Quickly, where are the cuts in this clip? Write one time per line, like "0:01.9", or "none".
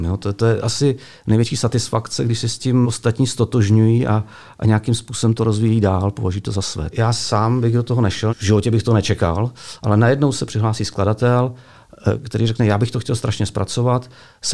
0:02.8
0:06.9
0:08.3